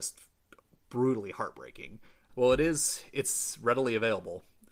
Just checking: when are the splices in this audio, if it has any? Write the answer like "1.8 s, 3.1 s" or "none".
2.3 s